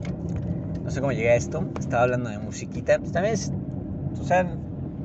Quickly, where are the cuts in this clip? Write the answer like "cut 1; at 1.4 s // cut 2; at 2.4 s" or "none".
cut 1; at 3.0 s